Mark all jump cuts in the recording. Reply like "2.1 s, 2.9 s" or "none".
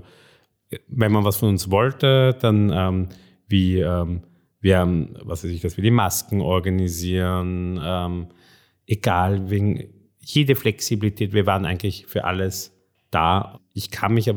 none